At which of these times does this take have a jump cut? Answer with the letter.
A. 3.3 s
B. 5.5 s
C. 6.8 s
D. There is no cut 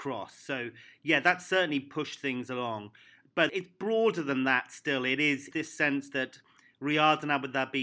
B